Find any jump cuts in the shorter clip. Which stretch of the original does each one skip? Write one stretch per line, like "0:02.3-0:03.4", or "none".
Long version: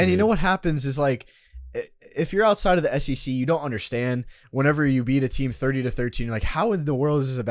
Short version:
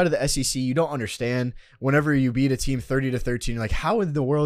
none